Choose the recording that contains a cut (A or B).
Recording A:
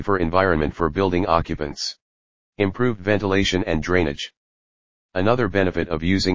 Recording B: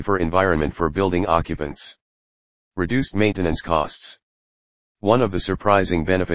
A